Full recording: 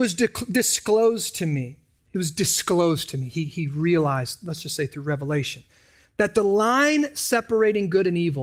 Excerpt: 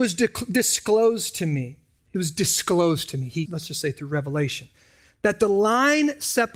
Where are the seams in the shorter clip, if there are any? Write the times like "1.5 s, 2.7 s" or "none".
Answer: 3.5 s